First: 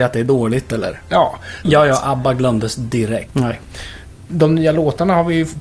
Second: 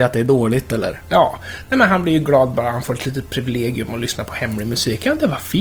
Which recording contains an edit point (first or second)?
first